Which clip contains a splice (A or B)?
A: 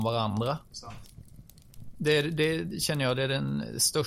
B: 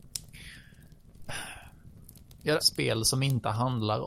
B